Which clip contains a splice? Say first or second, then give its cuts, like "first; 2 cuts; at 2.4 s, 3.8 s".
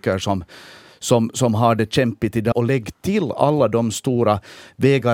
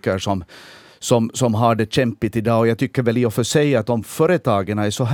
first; 1 cut; at 2.5 s